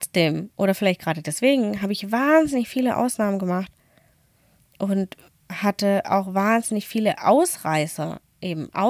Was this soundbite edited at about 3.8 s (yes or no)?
no